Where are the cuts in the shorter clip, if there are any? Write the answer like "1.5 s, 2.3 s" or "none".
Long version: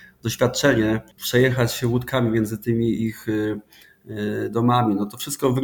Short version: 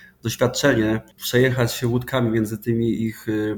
none